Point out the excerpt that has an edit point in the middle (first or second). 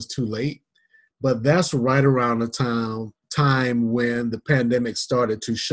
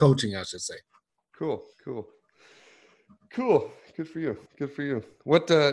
second